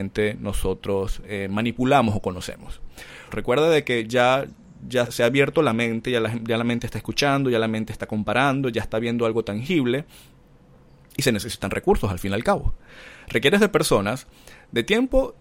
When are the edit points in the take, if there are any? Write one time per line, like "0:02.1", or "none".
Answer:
0:03.3
0:05.1